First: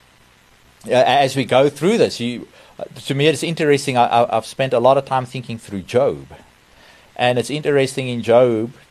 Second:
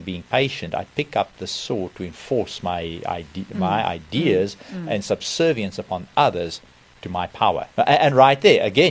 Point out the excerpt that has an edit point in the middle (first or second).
second